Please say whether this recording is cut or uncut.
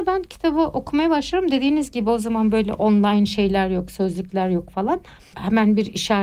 cut